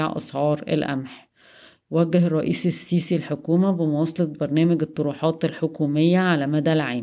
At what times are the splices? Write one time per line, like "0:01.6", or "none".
none